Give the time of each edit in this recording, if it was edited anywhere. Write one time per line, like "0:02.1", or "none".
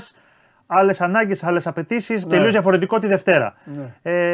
0:02.2